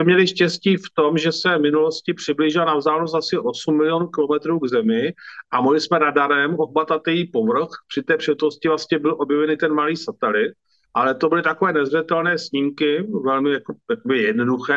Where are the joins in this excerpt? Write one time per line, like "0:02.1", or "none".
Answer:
none